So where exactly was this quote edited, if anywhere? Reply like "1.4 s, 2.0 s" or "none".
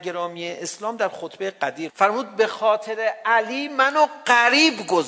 1.9 s